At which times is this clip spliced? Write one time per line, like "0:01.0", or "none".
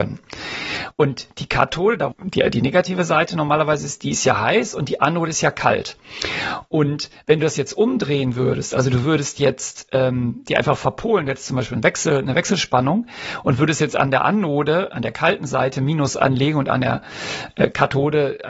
0:02.1